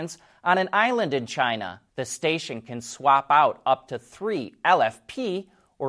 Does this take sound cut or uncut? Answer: cut